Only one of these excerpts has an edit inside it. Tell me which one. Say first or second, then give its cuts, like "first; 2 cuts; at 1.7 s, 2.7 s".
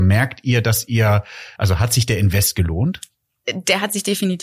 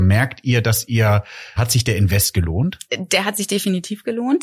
second; 2 cuts; at 1.6 s, 2.9 s